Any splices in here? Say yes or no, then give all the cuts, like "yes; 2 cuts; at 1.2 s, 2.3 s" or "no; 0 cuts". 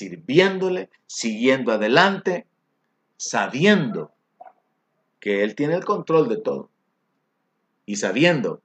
no; 0 cuts